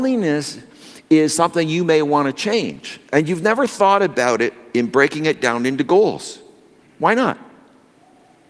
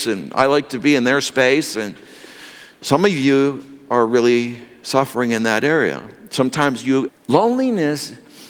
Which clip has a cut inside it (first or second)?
second